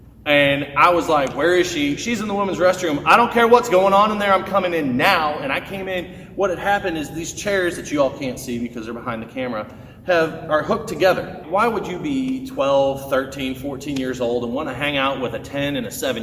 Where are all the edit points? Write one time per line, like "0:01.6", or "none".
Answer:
0:11.4